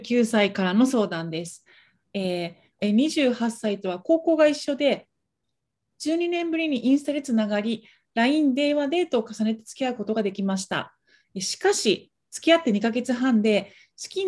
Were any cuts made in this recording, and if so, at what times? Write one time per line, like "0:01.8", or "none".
0:02.8